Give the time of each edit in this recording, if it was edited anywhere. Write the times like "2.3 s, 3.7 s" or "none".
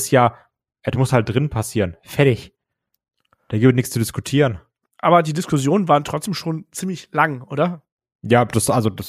none